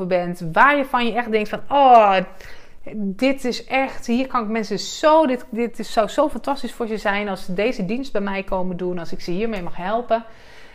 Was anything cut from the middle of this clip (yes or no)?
no